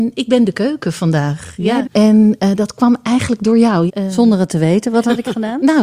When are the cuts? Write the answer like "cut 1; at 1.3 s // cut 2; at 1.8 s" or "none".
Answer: cut 1; at 1.8 s // cut 2; at 3.9 s

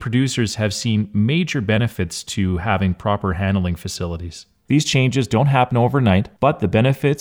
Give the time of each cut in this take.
none

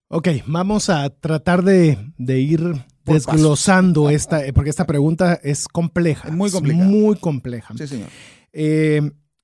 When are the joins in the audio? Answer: none

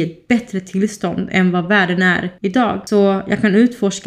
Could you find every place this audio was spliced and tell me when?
none

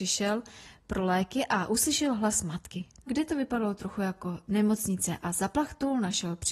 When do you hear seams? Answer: cut 1; at 3.1 s

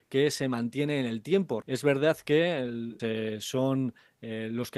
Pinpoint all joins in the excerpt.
cut 1; at 1.6 s // cut 2; at 3.0 s

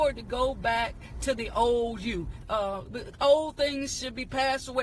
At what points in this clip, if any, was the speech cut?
cut 1; at 2.4 s

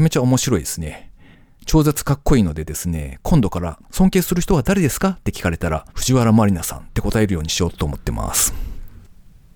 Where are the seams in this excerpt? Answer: cut 1; at 3.8 s // cut 2; at 5.9 s

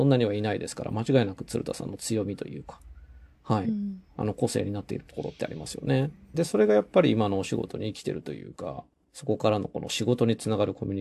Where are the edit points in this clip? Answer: cut 1; at 6.3 s // cut 2; at 9.0 s

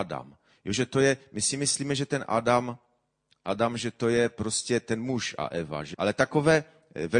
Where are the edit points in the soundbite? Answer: cut 1; at 5.9 s

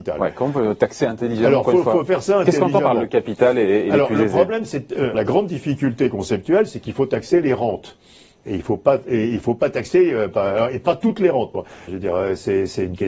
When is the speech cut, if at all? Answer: cut 1; at 5.1 s // cut 2; at 11.9 s

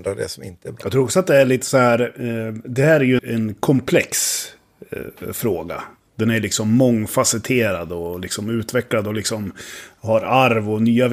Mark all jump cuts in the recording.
cut 1; at 3.2 s

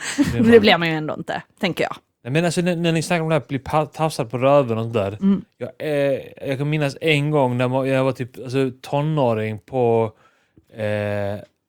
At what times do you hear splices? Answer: none

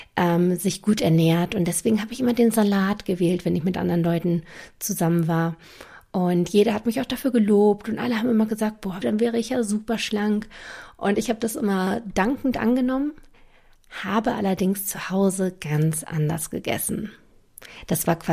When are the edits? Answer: cut 1; at 9.0 s

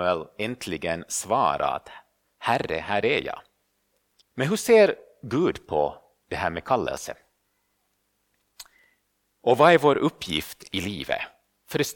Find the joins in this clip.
cut 1; at 4.2 s

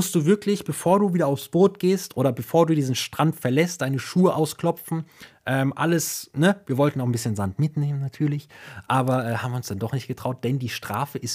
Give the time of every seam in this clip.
none

